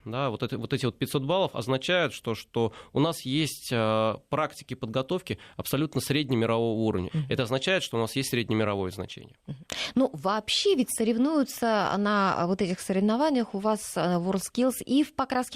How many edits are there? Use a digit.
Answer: 1